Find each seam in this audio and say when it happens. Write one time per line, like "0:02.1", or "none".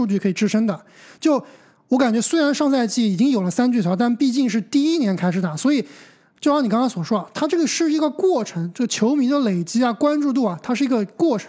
none